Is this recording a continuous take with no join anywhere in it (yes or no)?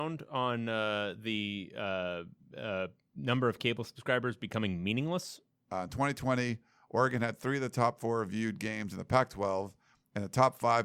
no